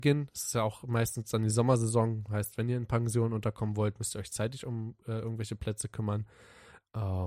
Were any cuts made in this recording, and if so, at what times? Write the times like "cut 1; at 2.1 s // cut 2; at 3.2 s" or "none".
none